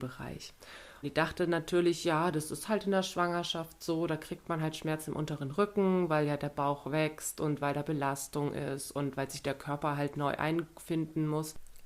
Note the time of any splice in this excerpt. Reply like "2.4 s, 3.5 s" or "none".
1.0 s